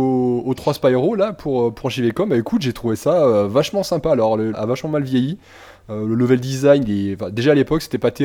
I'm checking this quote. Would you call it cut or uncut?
cut